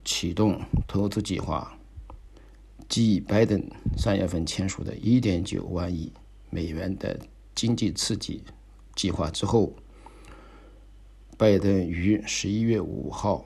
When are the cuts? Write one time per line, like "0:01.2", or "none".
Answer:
none